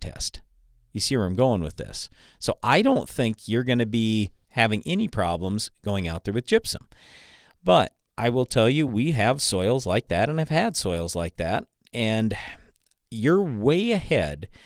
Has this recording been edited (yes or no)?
no